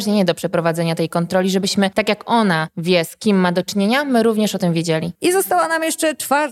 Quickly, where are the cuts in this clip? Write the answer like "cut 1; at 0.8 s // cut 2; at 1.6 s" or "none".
none